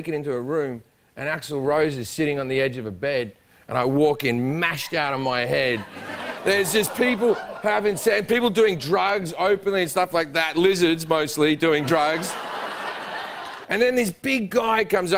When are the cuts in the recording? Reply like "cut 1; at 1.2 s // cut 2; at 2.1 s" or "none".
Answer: cut 1; at 6.4 s // cut 2; at 13.6 s